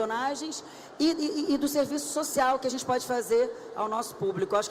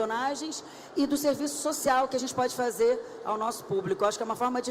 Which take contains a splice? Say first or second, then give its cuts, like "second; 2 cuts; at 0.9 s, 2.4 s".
second; 1 cut; at 0.9 s